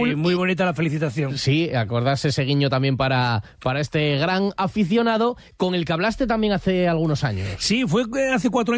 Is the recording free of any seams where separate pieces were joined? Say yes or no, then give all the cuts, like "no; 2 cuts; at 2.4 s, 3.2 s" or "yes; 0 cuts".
yes; 0 cuts